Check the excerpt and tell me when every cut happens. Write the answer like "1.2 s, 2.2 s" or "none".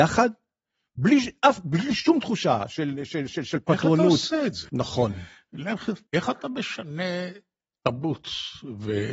4.7 s, 6.1 s

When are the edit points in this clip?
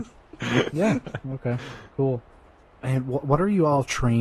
none

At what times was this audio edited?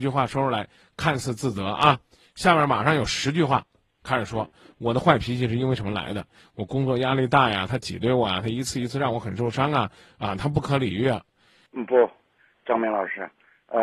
11.7 s

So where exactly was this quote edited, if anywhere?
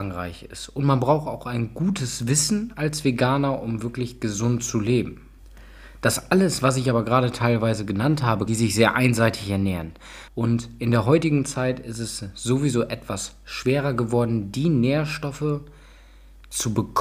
8.5 s, 10.3 s

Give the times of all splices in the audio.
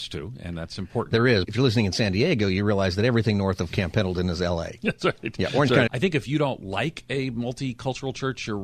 1.4 s, 5.9 s

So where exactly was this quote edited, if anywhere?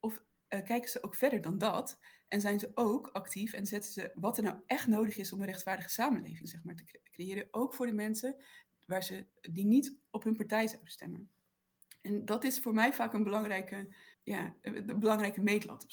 4.1 s, 14.1 s

